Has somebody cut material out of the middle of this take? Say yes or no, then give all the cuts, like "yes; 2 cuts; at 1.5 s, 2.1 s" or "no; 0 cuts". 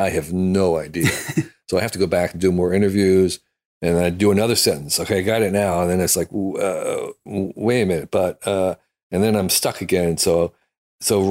no; 0 cuts